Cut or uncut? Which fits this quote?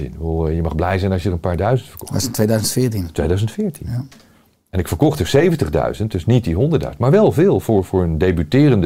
uncut